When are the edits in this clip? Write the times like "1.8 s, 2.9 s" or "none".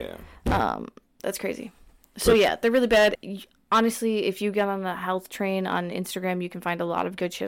1.2 s, 3.1 s